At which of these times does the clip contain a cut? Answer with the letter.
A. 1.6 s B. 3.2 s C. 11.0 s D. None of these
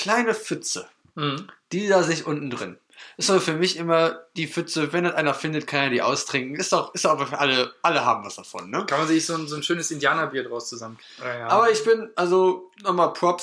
C